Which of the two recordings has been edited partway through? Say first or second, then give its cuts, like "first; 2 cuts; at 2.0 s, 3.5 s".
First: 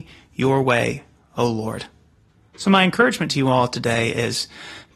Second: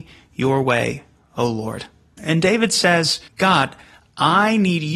second; 2 cuts; at 2.2 s, 3.3 s